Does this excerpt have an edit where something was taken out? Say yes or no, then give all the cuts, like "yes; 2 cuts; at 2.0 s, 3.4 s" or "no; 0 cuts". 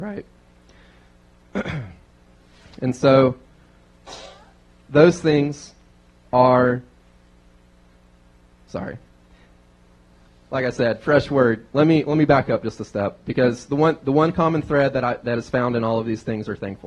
no; 0 cuts